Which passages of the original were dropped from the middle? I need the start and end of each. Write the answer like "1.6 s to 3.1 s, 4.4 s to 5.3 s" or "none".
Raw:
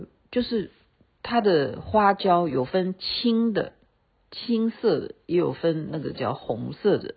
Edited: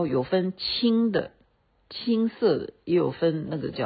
none